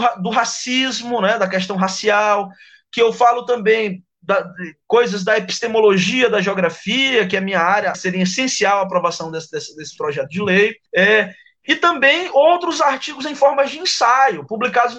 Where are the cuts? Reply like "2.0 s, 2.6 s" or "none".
7.9 s, 10.9 s